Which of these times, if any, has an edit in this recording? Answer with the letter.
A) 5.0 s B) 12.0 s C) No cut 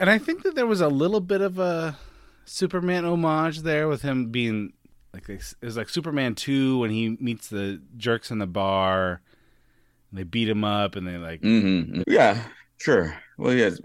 B